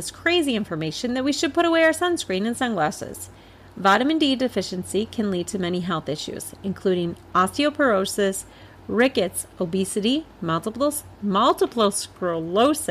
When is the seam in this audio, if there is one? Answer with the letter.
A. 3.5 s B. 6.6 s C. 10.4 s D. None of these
D